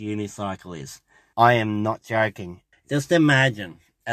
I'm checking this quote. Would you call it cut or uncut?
cut